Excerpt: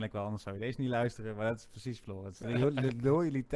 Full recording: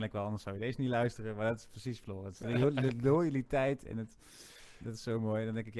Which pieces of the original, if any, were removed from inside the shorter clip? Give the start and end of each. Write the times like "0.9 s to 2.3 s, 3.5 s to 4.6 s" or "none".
none